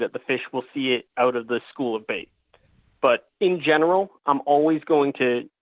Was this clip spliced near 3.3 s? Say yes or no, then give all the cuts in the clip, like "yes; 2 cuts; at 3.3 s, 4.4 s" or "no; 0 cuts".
yes; 1 cut; at 3.3 s